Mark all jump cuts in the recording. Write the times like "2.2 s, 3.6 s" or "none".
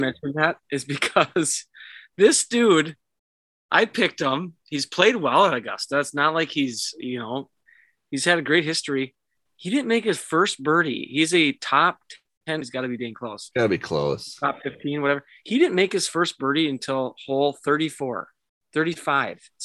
12.6 s